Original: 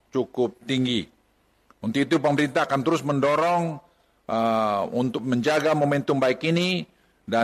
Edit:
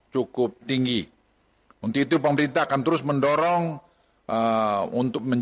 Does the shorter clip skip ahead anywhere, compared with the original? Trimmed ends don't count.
no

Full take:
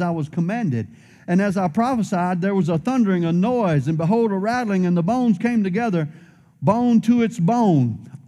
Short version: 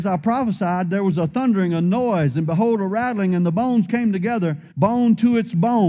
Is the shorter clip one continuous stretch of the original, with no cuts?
no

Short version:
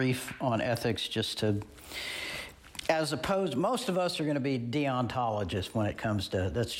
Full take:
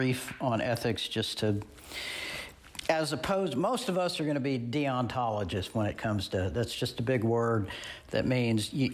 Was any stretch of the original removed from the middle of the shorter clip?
no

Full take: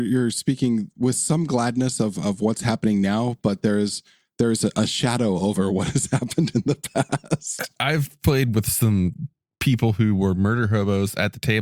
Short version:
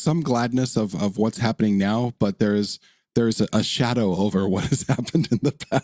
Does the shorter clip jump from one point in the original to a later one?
no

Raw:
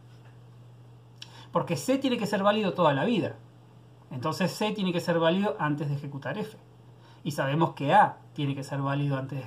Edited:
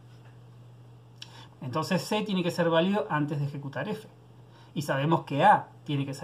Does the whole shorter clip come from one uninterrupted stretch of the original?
no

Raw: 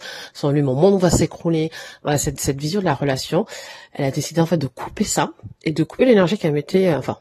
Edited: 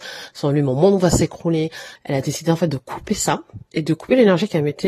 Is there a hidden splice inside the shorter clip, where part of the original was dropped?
yes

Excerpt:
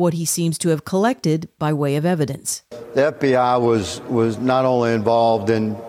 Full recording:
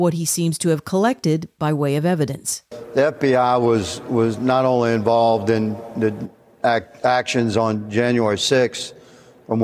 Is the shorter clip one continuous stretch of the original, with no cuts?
yes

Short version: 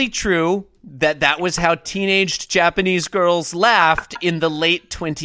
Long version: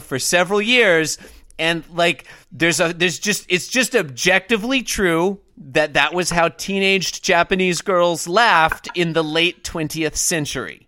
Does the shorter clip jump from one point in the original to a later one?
no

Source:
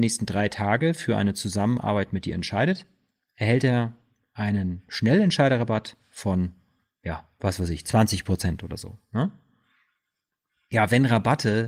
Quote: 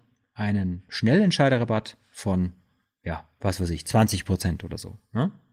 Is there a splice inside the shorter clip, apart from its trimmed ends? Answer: no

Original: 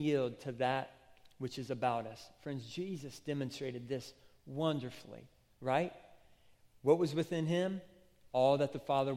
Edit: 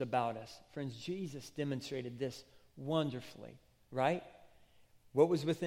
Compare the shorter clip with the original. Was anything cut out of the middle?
no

